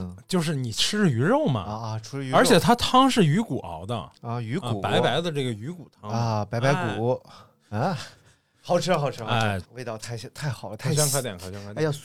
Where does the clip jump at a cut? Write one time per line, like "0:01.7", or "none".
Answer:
0:09.6